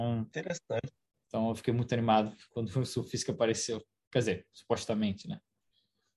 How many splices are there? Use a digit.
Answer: 1